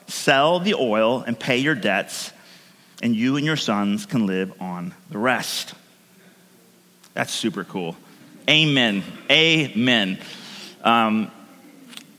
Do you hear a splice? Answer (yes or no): no